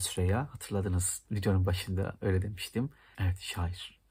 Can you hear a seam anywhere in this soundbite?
yes; 1 cut; at 3.1 s

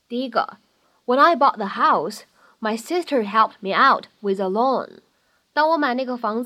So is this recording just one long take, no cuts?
yes; 0 cuts

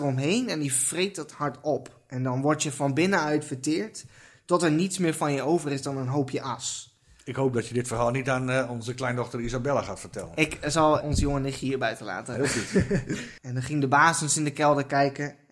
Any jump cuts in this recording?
yes; 2 cuts; at 11.0 s, 13.4 s

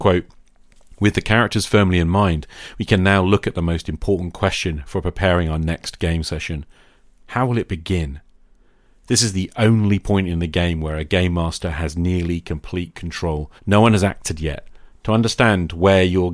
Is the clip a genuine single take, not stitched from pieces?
no; 2 cuts; at 13.6 s, 14.9 s

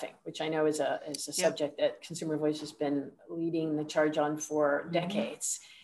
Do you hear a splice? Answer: no; 0 cuts

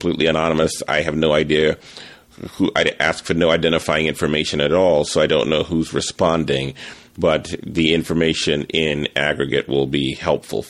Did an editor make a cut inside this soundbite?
no; 0 cuts

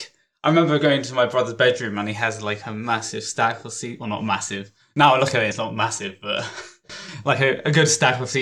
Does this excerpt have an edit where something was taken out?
no; 0 cuts

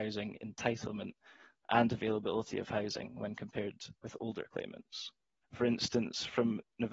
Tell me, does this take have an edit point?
yes; 1 cut; at 5.4 s

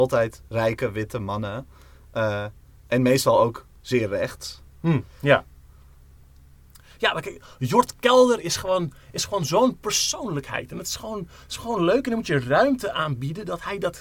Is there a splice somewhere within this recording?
no; 0 cuts

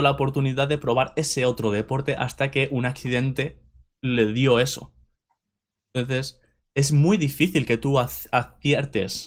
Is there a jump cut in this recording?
no; 0 cuts

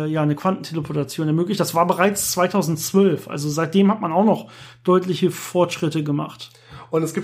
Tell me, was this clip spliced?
no; 0 cuts

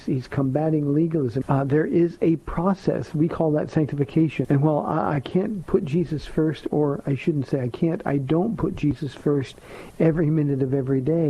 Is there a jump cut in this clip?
yes; 2 cuts; at 1.4 s, 4.4 s

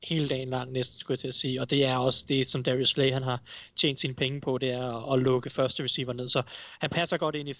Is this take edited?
no; 0 cuts

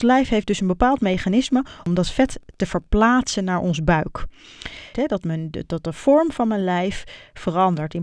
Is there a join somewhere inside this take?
yes; 1 cut; at 4.9 s

